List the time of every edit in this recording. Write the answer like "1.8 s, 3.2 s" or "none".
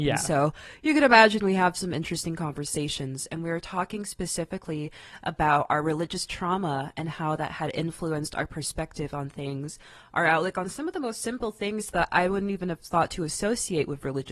none